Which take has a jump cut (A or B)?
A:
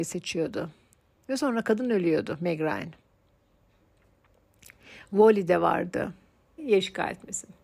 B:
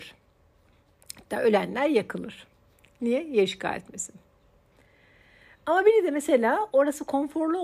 A